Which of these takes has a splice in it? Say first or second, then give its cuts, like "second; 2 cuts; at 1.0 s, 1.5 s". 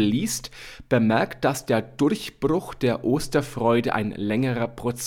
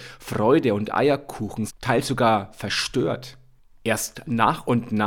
second; 1 cut; at 1.7 s